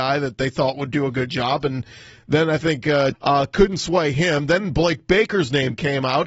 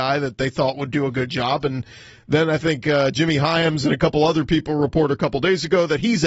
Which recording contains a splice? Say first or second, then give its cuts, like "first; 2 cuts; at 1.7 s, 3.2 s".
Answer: first; 1 cut; at 3.1 s